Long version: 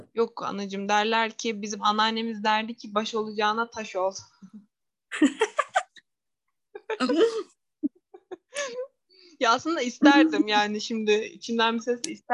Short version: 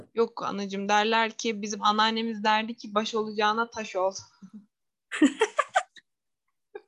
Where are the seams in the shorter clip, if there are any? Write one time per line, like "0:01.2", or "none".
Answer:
none

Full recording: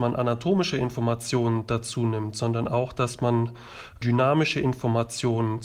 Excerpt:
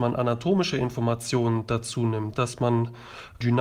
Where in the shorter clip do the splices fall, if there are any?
0:02.3

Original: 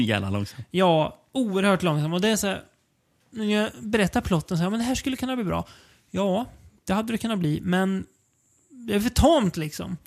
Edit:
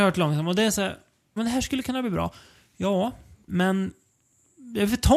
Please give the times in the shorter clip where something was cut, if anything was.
0:01.4
0:03.5

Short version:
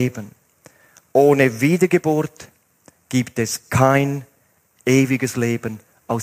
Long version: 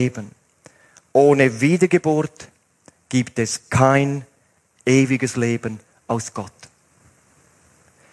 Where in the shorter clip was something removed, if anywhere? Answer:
none

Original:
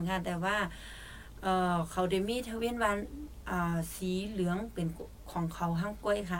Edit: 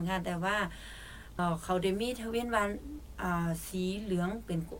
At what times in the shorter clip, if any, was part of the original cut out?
0:01.4

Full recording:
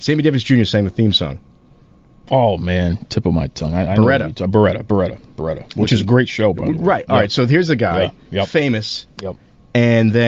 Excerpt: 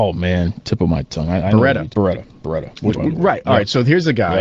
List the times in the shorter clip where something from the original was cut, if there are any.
0:01.9
0:02.9

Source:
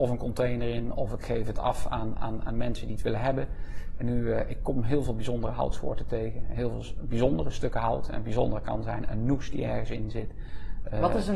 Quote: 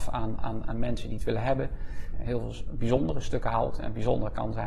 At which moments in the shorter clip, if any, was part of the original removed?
0:02.1

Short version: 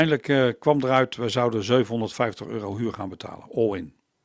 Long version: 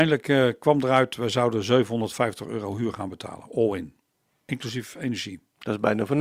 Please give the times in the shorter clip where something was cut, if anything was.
none

